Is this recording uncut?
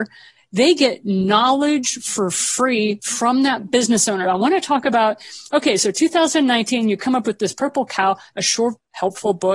no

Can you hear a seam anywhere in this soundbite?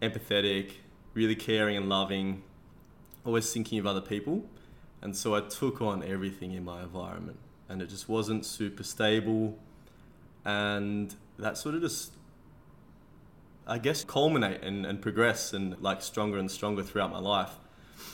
yes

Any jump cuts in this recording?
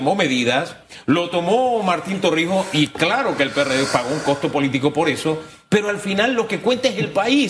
no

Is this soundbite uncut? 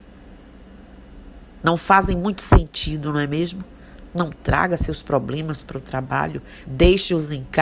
no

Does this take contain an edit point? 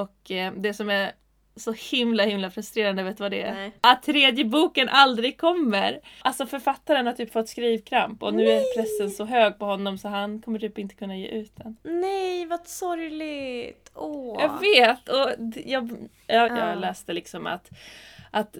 yes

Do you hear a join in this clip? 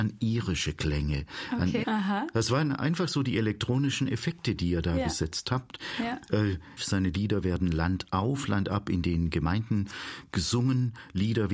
yes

